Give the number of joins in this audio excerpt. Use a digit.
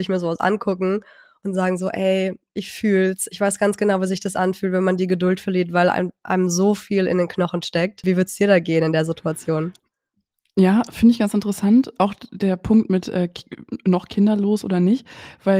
1